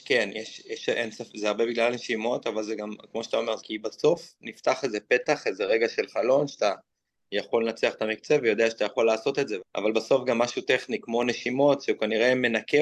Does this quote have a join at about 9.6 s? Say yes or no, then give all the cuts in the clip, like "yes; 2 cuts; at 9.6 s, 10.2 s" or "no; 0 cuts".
yes; 2 cuts; at 3.6 s, 9.6 s